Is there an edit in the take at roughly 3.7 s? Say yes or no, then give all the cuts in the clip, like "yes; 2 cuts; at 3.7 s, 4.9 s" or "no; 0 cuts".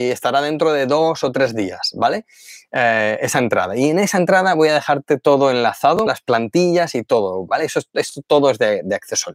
no; 2 cuts; at 6.1 s, 7.5 s